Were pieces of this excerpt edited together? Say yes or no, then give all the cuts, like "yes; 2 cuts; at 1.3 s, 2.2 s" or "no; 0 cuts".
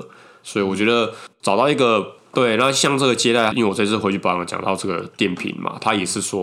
yes; 2 cuts; at 2.3 s, 3.5 s